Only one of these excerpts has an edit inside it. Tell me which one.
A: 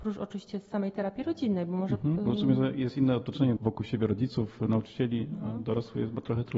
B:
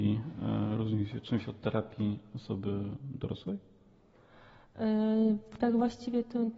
A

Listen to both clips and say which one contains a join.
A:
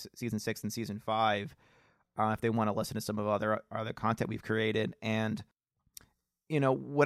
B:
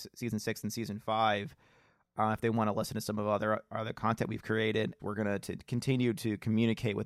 B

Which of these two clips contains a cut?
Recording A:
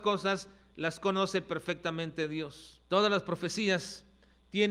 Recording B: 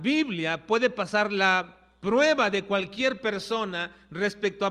A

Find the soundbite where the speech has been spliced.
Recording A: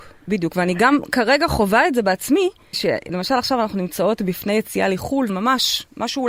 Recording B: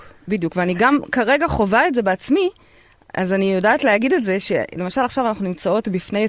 A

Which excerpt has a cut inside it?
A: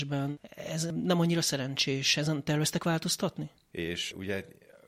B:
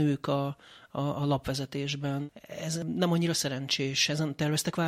A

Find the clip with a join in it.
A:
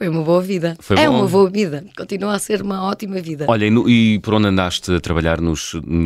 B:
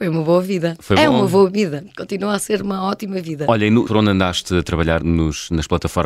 B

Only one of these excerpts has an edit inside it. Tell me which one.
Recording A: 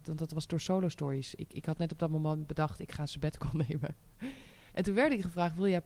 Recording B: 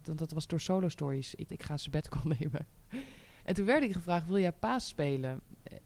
B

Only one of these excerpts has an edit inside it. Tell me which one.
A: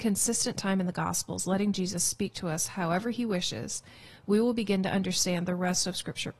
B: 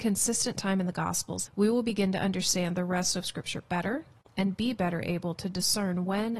B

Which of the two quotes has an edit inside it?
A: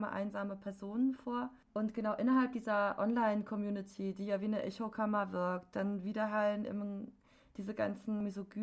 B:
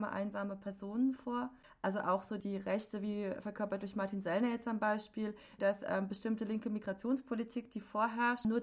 B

